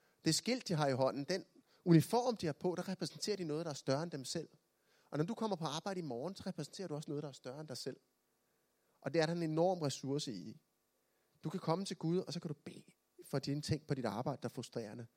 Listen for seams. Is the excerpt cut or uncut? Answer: uncut